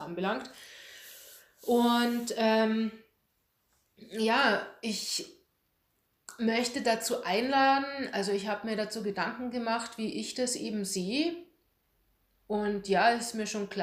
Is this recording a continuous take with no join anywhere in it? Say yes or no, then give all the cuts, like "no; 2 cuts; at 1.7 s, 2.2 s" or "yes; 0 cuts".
yes; 0 cuts